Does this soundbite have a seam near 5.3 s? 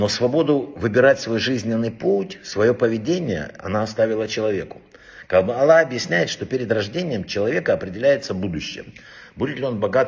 no; 0 cuts

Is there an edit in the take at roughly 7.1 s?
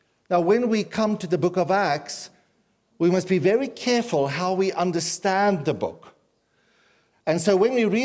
yes; 1 cut; at 7.1 s

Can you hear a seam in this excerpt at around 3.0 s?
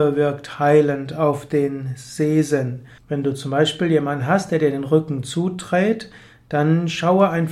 yes; 1 cut; at 3.0 s

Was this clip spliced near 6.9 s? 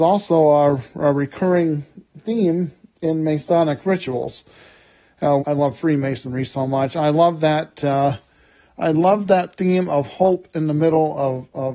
no; 1 cut; at 5.4 s

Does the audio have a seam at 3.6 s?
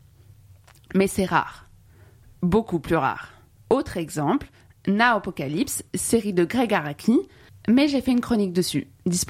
yes; 2 cuts; at 3.6 s, 7.5 s

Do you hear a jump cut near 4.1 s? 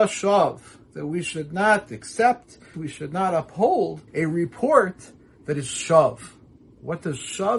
yes; 2 cuts; at 2.7 s, 4.1 s

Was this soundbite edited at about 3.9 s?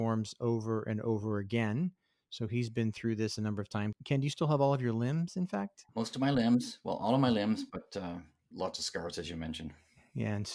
yes; 1 cut; at 3.9 s

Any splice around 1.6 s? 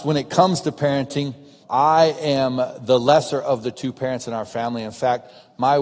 yes; 1 cut; at 1.6 s

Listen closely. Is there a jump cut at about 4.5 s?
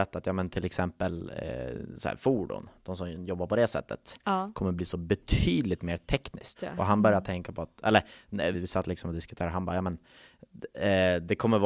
no; 2 cuts; at 6.6 s, 8.5 s

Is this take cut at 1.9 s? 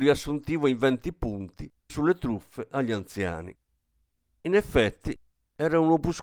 yes; 1 cut; at 1.9 s

